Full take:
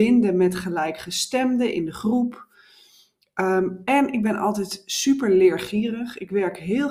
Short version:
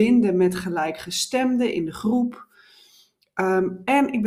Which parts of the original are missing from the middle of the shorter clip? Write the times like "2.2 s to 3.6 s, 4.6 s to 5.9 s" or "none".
none